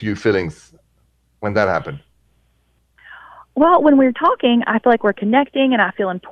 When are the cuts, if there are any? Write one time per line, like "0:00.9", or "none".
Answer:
none